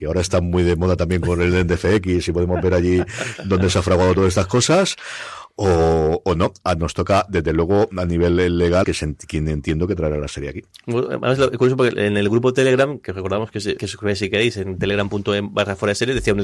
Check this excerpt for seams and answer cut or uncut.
cut